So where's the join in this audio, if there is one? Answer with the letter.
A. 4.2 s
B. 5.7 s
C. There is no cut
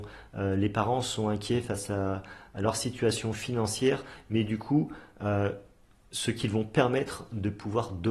C